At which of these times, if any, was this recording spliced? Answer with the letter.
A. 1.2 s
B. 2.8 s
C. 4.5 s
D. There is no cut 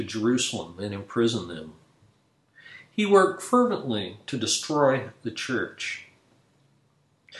D